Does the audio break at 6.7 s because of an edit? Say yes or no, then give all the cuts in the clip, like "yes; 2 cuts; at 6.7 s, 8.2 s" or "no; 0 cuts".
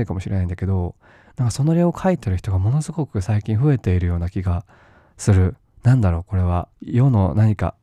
yes; 1 cut; at 6.7 s